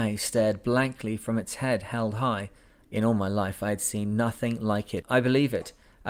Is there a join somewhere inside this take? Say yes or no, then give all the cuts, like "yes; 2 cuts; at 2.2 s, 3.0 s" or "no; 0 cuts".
yes; 2 cuts; at 2.8 s, 5.0 s